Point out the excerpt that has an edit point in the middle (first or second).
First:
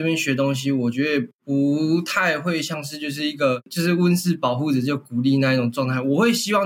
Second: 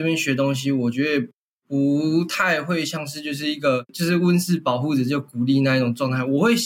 first